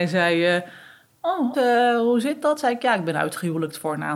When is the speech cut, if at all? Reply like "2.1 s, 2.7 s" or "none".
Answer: 1.5 s